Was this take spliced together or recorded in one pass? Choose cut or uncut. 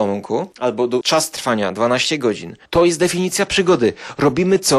cut